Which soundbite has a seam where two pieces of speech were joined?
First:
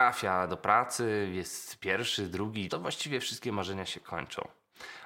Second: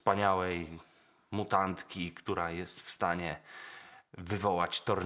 first; 1 cut; at 2.7 s

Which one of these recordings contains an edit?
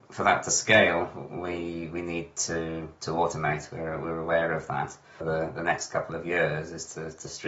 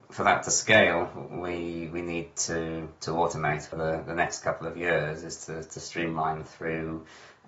second; 1 cut; at 3.7 s

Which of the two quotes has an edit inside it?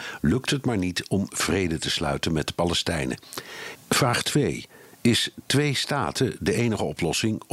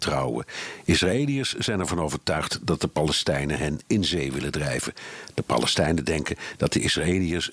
first; 1 cut; at 3.8 s

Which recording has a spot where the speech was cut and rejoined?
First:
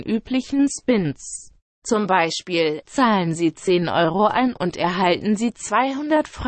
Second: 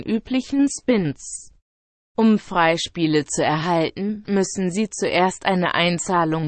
first; 1 cut; at 1.7 s

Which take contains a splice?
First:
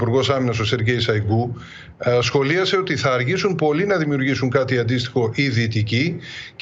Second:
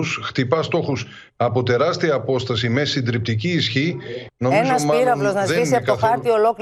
second; 1 cut; at 4.3 s

